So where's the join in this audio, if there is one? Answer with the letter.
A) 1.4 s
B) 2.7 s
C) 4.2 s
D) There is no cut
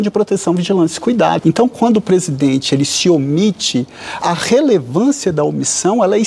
A